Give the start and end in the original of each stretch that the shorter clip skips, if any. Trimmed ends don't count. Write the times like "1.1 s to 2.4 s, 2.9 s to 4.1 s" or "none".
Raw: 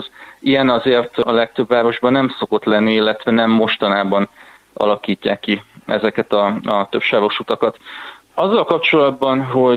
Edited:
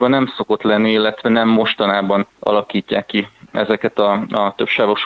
4.3 s to 4.6 s